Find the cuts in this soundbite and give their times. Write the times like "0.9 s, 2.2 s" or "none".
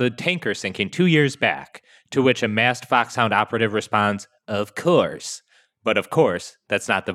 none